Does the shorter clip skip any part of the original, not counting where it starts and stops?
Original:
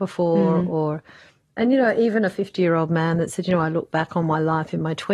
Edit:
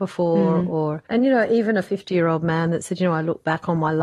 yes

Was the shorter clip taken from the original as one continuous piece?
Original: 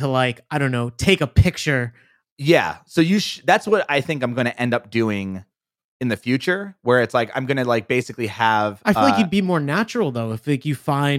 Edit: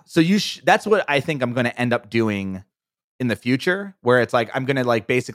yes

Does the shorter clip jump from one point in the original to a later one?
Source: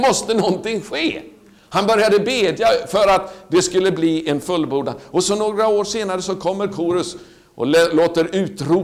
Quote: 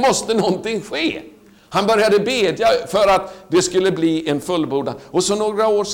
no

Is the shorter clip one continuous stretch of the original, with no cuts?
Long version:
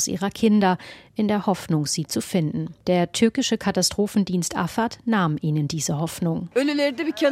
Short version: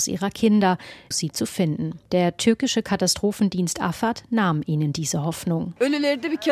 no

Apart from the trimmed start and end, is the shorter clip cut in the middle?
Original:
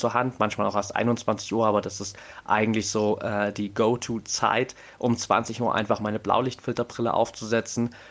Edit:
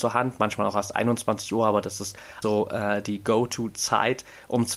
yes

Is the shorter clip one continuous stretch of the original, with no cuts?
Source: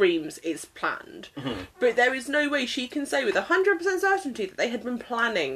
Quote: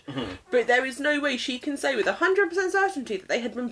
yes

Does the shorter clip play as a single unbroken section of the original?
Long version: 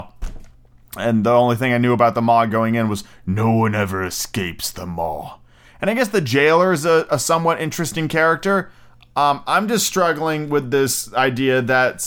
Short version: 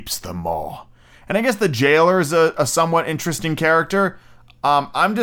yes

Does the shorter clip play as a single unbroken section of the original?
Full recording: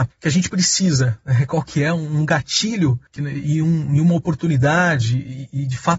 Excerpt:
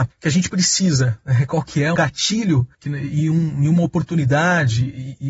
no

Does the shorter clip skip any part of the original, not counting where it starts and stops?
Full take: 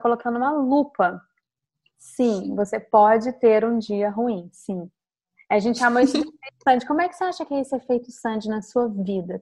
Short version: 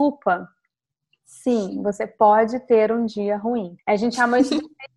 yes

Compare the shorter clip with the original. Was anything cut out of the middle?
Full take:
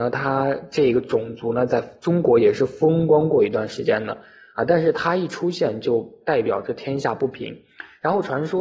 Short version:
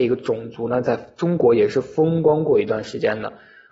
no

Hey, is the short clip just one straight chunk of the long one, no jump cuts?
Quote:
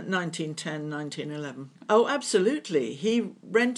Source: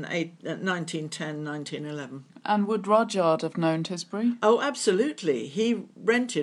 no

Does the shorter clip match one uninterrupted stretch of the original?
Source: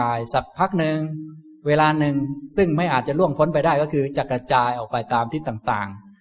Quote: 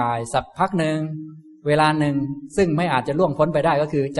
yes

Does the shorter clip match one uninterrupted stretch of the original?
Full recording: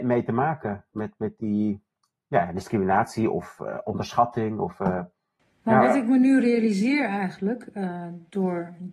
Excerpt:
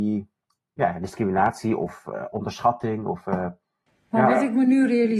yes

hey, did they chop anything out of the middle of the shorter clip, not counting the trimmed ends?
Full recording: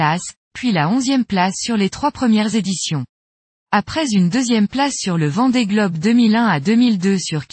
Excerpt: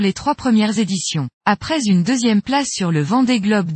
yes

